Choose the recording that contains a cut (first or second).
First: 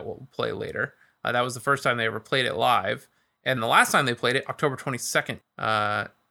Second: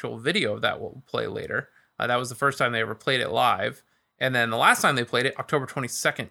first